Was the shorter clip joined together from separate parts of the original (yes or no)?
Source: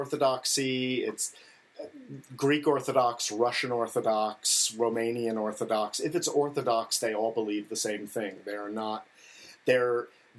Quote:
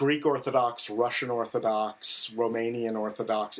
no